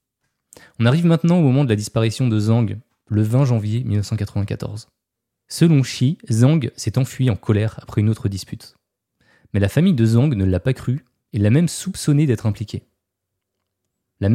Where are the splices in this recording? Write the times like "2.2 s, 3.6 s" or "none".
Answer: none